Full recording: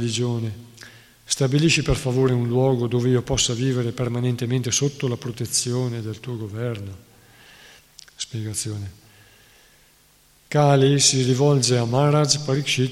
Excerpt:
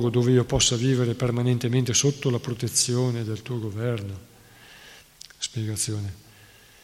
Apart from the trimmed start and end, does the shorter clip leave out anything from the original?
no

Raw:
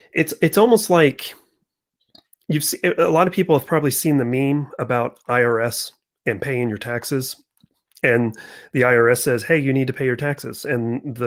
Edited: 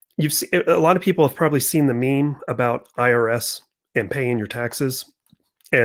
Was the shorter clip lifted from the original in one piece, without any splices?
yes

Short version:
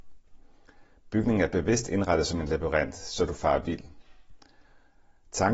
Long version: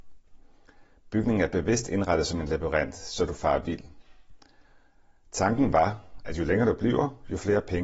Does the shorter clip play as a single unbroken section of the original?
yes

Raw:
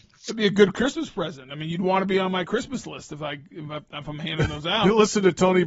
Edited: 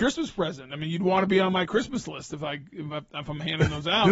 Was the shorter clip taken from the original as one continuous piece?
yes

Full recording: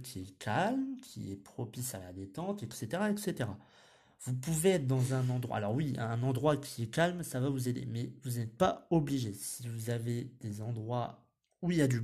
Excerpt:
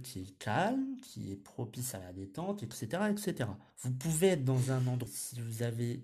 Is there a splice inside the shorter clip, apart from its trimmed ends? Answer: yes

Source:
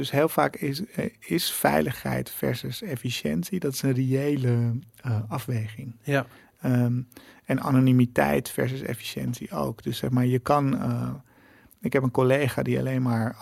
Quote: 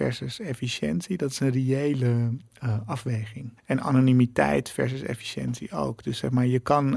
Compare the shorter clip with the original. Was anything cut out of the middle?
yes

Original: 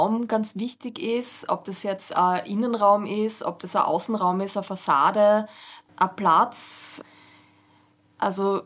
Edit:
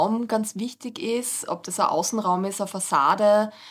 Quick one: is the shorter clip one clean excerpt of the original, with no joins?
no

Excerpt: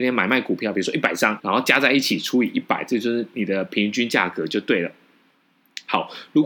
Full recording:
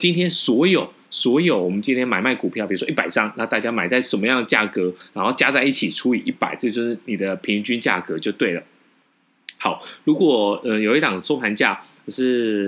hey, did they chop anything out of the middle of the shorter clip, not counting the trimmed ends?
yes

